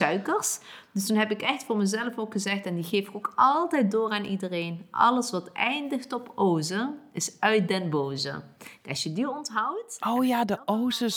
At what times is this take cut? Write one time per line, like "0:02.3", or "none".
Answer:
none